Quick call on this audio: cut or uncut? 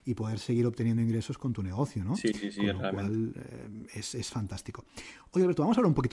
uncut